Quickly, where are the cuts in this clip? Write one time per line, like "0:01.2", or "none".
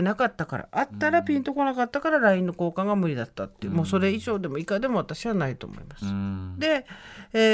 none